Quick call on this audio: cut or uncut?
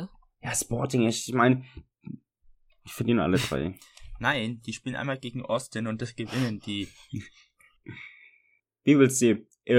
uncut